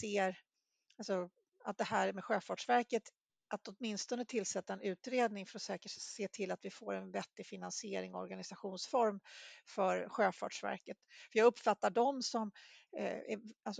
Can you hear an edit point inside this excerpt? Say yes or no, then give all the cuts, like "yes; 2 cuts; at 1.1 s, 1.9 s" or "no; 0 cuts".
no; 0 cuts